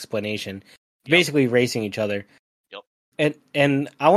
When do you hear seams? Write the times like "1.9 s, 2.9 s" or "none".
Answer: none